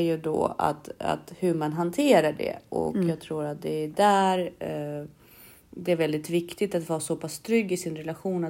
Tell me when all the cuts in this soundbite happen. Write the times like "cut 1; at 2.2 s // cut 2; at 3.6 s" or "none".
none